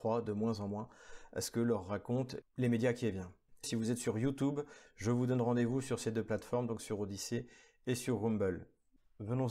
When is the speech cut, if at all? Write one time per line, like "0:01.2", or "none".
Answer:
0:03.6
0:04.9